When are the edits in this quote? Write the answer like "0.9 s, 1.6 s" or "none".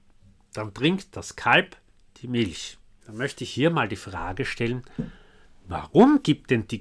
3.0 s